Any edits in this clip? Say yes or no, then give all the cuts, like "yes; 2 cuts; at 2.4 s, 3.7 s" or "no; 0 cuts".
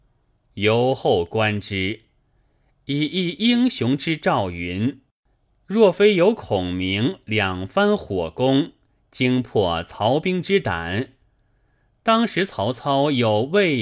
yes; 1 cut; at 5.5 s